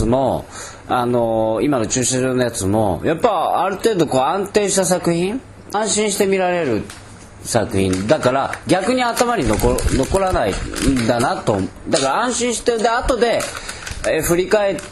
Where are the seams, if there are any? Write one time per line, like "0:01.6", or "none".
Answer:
0:05.7